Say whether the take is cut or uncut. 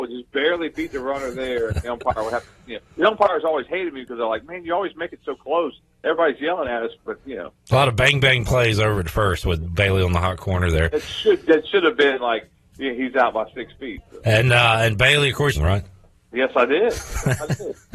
cut